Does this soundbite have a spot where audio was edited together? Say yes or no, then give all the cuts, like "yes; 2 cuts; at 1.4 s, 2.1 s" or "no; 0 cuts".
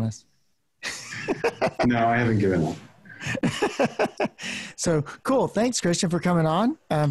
no; 0 cuts